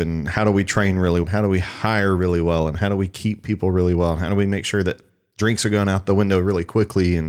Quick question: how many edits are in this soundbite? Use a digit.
1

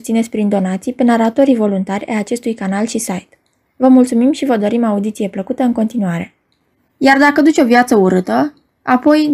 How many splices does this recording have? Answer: 0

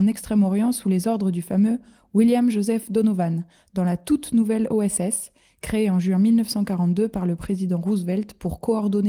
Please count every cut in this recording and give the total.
0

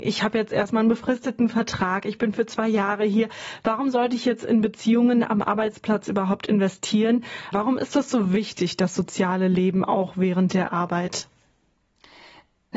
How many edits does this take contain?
1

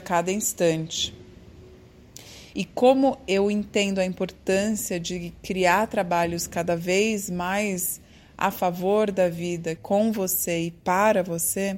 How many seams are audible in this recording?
2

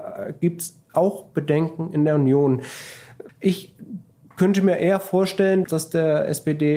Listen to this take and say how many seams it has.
2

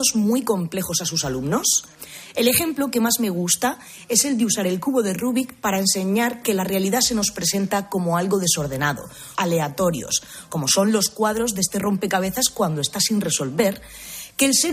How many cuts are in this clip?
1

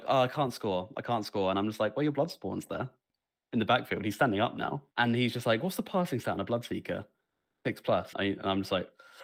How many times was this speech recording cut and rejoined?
2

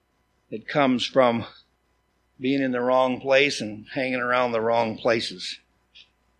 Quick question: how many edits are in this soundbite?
0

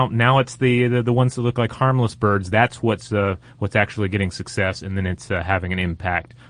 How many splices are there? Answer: 0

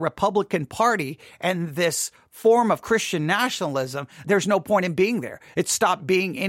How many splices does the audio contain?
1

